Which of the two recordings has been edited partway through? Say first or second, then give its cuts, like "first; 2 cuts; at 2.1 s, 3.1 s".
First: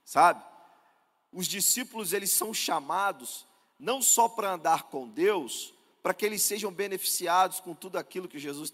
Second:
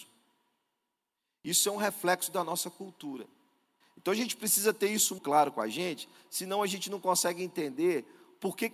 second; 2 cuts; at 3.8 s, 5.2 s